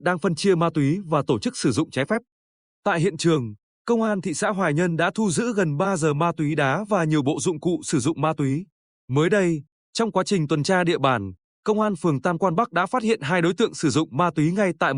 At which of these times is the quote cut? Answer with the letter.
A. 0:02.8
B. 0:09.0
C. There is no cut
B